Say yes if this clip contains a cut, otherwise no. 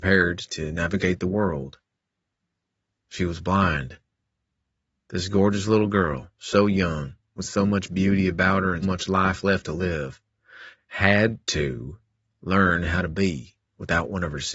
yes